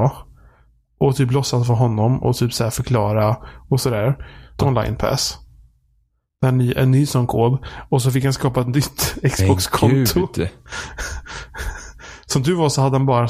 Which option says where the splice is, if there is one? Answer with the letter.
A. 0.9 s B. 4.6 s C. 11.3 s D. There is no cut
B